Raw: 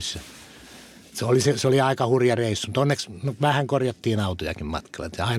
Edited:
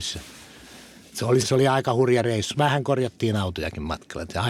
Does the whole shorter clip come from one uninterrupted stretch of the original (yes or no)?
no